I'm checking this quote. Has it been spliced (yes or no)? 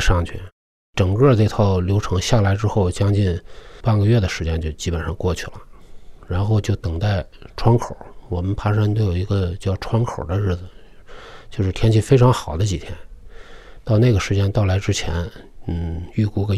no